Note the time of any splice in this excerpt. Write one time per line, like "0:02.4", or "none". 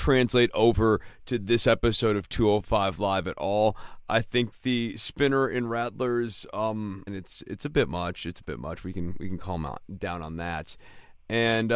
0:07.1